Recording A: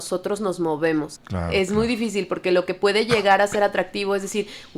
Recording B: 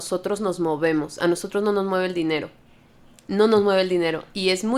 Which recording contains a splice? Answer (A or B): A